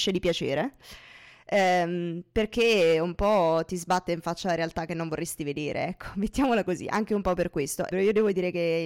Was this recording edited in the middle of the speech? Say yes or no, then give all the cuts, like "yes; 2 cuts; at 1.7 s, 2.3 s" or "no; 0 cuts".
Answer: yes; 1 cut; at 7.9 s